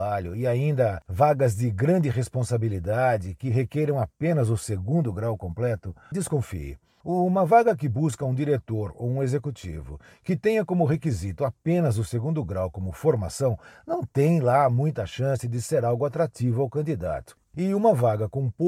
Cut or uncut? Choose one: cut